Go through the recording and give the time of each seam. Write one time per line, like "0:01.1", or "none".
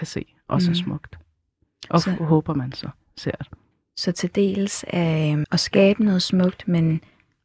0:05.4

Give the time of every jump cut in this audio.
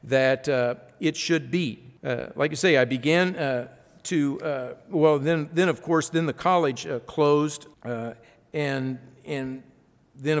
0:02.0
0:07.7

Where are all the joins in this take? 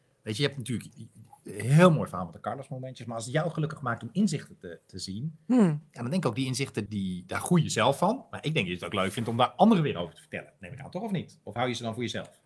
0:06.9

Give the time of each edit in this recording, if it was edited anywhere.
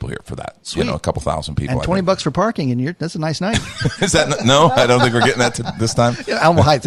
0:04.0

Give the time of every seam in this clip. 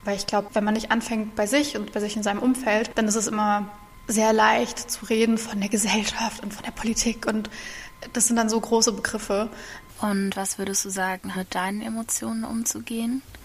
0:09.9
0:11.3

